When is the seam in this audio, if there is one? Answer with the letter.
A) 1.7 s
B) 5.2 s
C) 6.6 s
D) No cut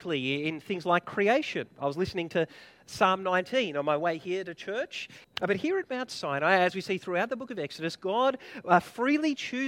B